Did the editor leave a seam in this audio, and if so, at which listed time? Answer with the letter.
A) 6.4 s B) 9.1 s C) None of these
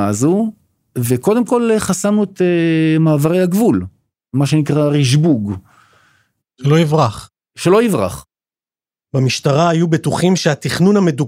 A